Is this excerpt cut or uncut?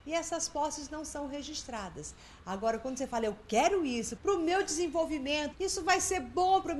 cut